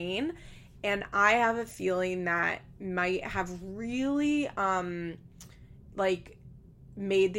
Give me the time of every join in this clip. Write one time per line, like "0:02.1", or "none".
none